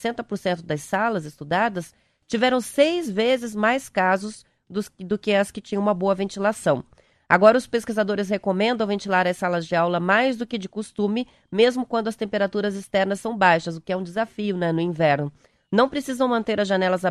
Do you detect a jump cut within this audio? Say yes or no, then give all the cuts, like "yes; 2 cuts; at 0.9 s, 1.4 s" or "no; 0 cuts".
no; 0 cuts